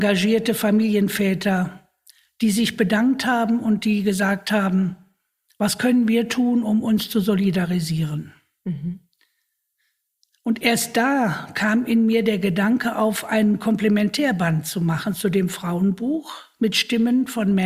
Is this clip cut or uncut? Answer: uncut